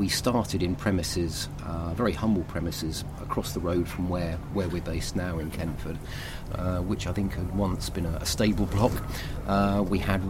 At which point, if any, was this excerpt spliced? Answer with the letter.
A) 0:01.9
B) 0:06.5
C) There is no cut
B